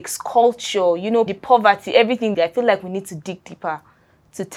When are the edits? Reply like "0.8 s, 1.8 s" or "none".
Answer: 1.3 s, 2.3 s

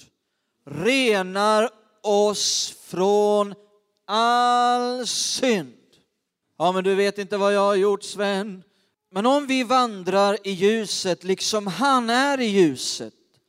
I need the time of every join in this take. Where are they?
6.4 s, 8.9 s

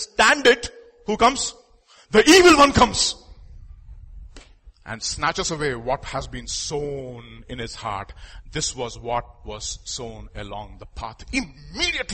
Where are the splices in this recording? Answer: none

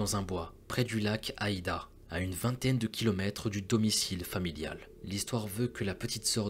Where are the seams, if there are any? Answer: none

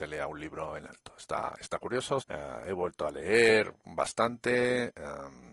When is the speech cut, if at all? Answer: 2.2 s

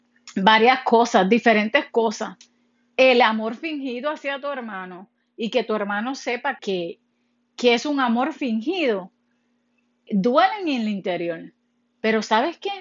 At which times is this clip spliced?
6.6 s, 10.1 s

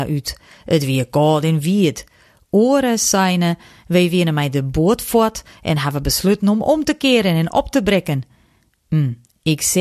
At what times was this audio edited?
none

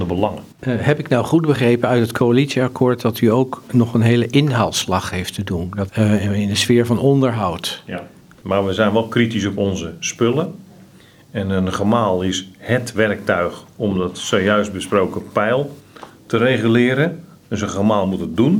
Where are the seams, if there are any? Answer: 5.9 s

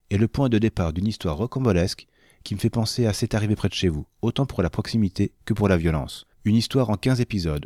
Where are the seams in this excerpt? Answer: 6.3 s

